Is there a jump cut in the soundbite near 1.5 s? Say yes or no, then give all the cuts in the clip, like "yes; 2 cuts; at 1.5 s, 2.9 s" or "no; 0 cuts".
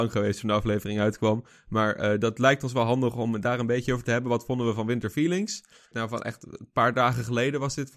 no; 1 cut; at 5.9 s